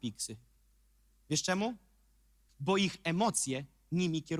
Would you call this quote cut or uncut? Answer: cut